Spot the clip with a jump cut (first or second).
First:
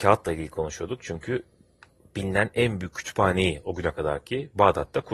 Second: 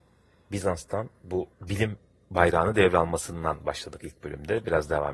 second